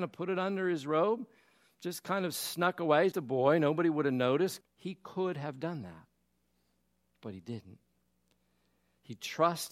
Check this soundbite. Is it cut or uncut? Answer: cut